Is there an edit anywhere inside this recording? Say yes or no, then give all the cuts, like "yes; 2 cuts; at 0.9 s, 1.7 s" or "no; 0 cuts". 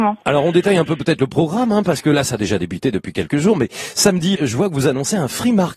yes; 1 cut; at 4.4 s